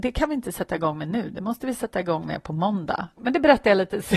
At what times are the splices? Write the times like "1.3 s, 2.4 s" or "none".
3.2 s